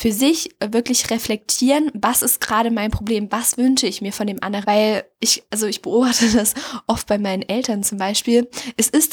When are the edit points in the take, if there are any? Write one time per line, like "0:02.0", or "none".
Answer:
0:04.6